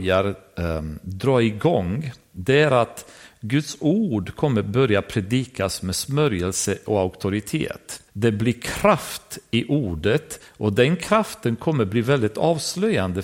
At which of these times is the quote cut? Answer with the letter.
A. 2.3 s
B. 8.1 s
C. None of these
B